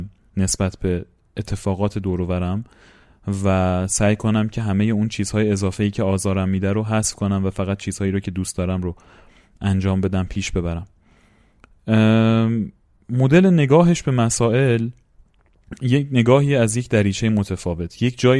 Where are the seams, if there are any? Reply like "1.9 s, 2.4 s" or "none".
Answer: none